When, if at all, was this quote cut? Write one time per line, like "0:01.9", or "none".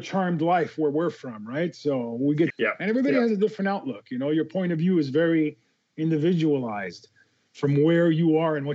0:02.5